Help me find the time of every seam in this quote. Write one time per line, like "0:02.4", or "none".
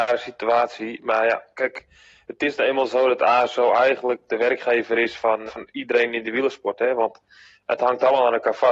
0:05.5